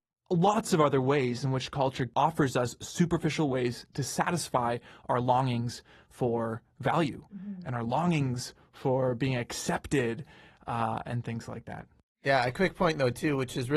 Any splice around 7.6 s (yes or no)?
no